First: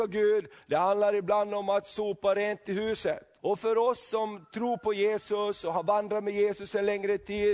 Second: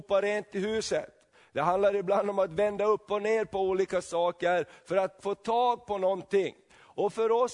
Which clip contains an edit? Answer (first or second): first